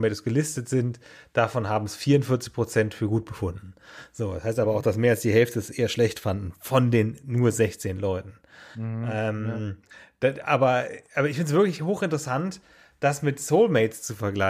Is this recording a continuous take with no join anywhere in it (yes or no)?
yes